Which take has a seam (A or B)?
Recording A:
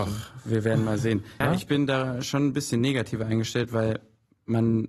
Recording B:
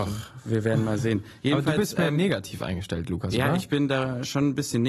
A